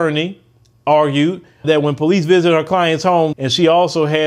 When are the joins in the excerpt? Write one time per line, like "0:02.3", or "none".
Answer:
0:01.6
0:03.3